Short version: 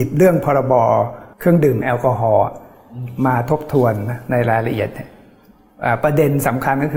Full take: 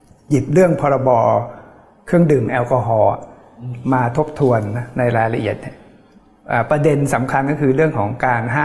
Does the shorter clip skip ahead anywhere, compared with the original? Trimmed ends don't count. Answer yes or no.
yes